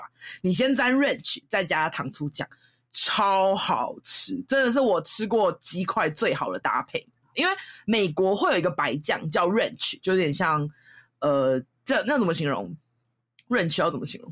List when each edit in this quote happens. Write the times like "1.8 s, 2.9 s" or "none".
7.3 s, 10.0 s